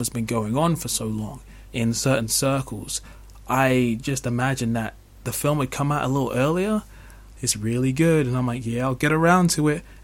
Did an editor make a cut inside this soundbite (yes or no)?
yes